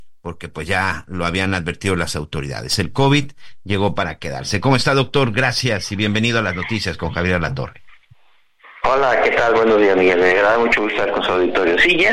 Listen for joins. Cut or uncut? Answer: uncut